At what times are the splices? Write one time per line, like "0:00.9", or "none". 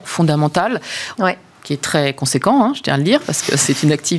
0:01.2